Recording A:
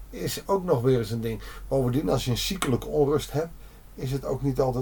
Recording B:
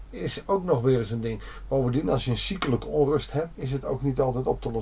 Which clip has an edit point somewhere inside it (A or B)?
B